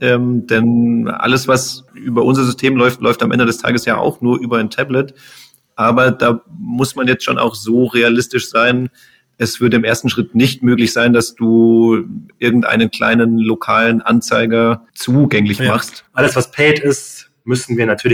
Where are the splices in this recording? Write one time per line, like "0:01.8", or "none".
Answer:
0:16.1